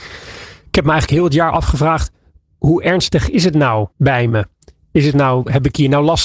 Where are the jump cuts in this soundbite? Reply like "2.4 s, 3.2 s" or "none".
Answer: 3.9 s